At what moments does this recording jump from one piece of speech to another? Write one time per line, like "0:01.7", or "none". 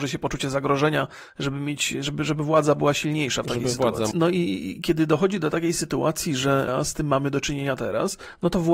0:04.1
0:06.7